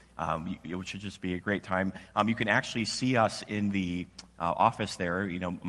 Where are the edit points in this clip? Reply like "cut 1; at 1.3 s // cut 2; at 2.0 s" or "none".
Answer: none